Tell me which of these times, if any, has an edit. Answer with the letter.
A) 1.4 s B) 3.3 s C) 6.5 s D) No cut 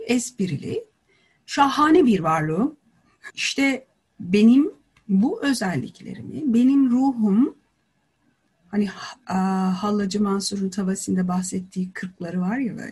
B